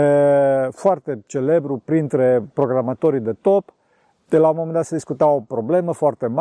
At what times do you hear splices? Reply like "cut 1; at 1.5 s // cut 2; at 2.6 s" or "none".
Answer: none

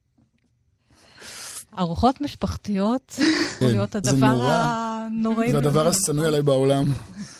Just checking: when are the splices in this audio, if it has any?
cut 1; at 3.6 s

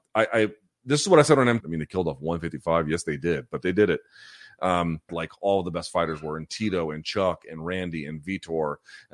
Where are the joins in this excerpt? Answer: cut 1; at 1.6 s // cut 2; at 5.1 s

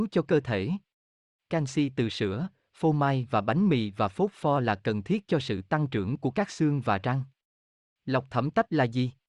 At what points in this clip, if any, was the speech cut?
cut 1; at 1.3 s

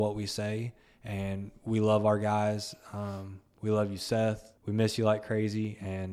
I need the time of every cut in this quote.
cut 1; at 4.6 s

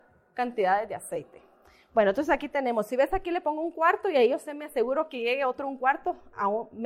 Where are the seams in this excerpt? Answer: none

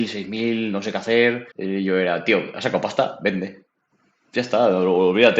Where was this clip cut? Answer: cut 1; at 1.5 s

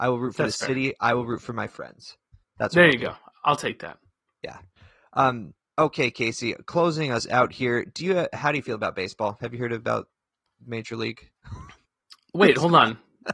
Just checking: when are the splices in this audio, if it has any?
none

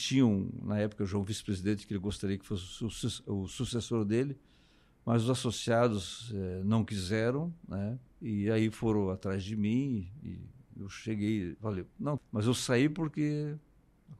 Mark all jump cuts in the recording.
cut 1; at 8.1 s // cut 2; at 12.2 s

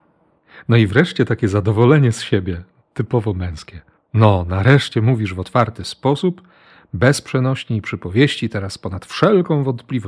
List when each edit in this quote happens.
none

